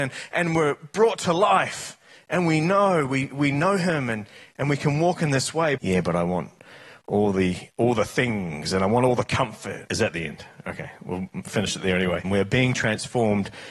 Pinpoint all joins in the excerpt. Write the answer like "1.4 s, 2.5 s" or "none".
5.8 s, 9.9 s, 12.2 s